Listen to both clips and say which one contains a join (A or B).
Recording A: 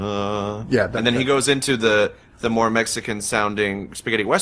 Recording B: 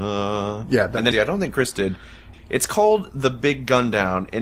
B